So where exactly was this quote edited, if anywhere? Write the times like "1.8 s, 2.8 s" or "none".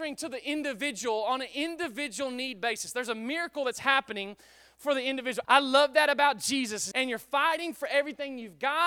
5.4 s, 6.9 s